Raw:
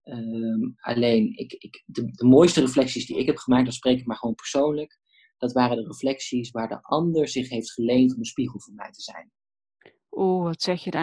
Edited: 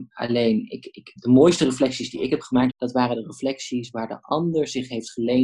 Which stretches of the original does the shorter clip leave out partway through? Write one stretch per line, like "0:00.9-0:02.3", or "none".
0:01.8-0:02.1
0:03.7-0:05.3